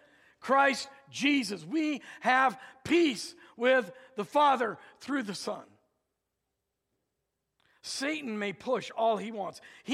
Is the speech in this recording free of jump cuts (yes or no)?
yes